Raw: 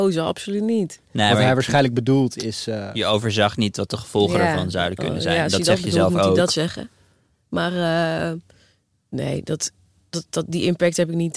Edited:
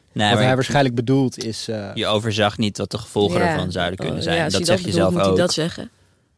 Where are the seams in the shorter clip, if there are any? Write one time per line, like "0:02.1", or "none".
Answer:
none

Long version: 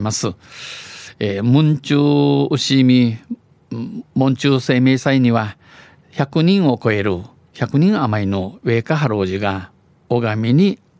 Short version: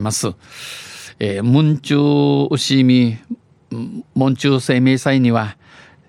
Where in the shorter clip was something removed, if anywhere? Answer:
none

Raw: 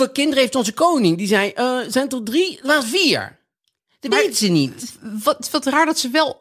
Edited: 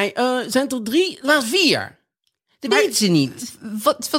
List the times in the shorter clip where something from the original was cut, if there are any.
none

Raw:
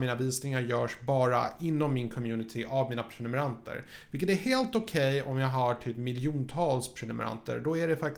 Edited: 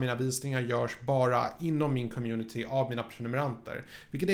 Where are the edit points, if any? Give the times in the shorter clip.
none

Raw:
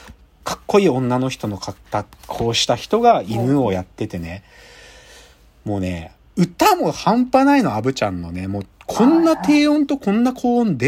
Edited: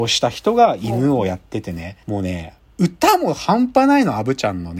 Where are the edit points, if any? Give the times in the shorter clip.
0:02.0

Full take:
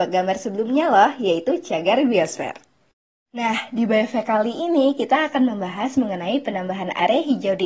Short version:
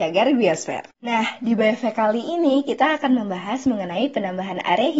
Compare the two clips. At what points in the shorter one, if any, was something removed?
0:00.9

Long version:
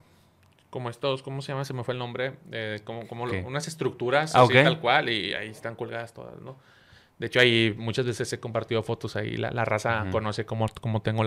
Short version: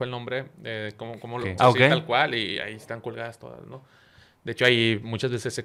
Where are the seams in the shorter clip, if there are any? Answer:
0:01.6

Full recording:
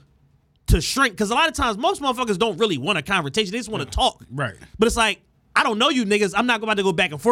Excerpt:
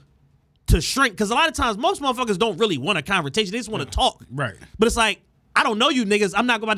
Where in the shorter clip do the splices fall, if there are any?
none

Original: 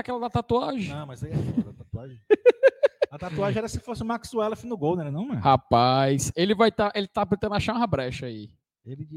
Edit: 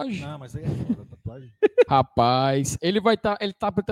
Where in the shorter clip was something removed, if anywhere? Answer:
0:01.9

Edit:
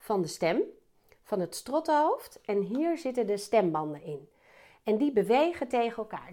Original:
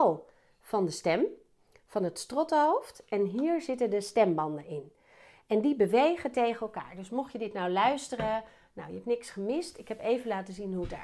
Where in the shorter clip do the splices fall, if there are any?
none

